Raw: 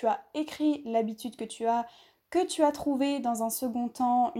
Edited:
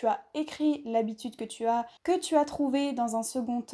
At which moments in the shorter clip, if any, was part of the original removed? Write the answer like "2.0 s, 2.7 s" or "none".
2.0 s